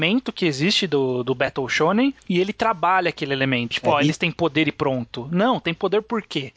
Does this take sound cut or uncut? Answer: cut